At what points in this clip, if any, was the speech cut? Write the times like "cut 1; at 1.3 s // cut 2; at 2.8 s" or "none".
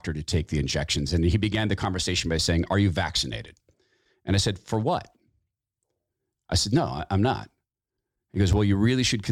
cut 1; at 6.3 s